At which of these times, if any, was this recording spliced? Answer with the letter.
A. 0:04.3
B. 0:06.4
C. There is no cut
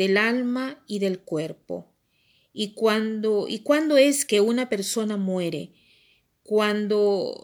A